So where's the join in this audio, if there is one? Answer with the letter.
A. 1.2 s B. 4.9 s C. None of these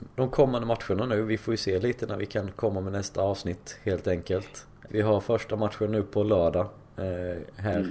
B